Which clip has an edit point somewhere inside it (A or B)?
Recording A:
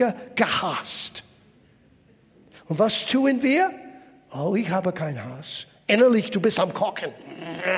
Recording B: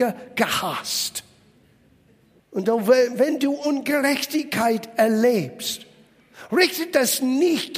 B